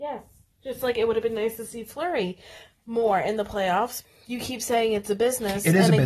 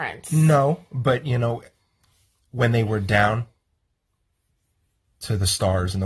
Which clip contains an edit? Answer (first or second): first